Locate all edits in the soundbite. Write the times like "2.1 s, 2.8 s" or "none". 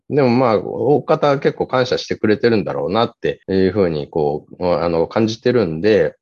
3.4 s